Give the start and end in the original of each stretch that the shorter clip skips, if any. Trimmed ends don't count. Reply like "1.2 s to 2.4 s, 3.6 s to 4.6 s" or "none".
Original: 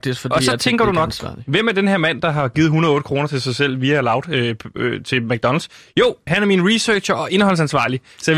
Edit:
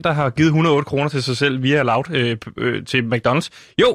none